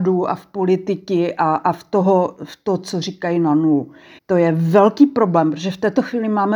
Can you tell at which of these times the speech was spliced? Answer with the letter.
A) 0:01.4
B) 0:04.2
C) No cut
B